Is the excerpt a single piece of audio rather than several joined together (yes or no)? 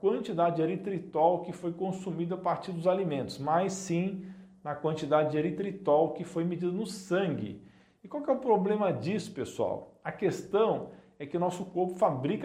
yes